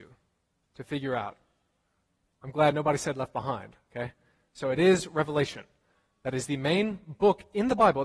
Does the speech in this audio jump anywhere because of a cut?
no; 0 cuts

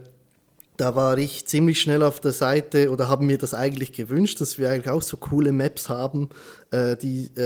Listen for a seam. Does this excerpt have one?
no; 0 cuts

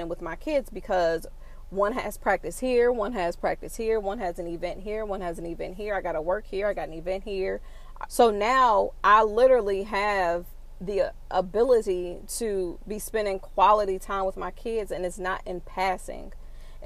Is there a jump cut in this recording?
yes; 1 cut; at 8.1 s

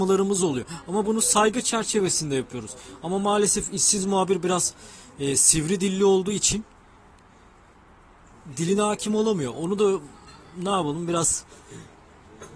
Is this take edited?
no; 0 cuts

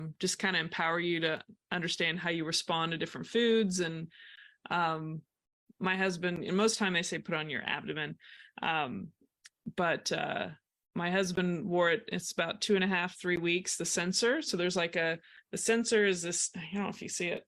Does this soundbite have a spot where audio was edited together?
no; 0 cuts

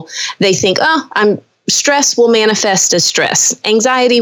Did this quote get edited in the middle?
no; 0 cuts

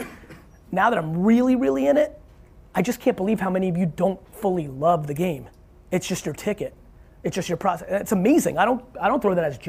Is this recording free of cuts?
yes; 0 cuts

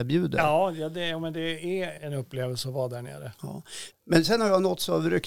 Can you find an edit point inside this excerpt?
yes; 1 cut; at 2.0 s

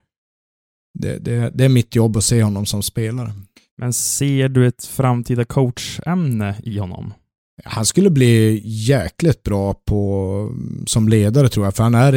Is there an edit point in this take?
no; 0 cuts

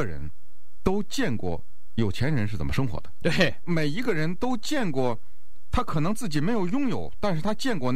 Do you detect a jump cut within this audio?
no; 0 cuts

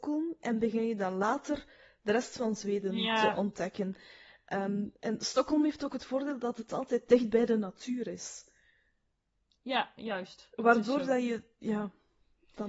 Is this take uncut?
yes; 0 cuts

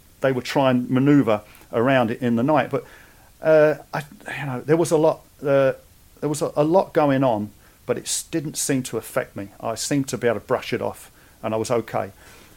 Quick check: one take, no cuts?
yes; 0 cuts

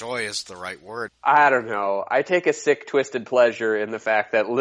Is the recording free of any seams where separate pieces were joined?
no; 1 cut; at 1.1 s

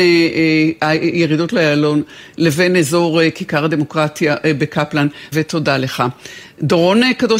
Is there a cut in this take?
yes; 1 cut; at 5.3 s

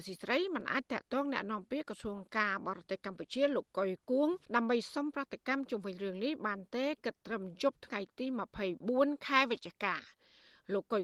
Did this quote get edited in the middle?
yes; 1 cut; at 4.4 s

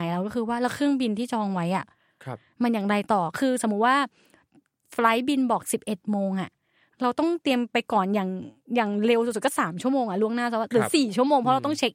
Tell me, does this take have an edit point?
no; 0 cuts

